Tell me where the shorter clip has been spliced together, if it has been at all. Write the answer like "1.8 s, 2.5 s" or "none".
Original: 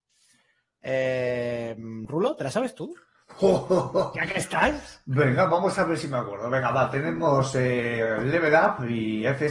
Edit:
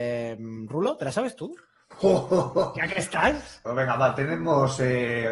3.6 s